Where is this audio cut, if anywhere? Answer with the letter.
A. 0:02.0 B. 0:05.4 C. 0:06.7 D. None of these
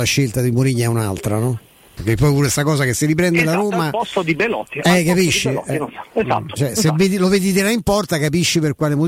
A